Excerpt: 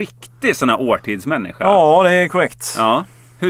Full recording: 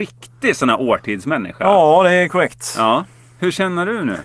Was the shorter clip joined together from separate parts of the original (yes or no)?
no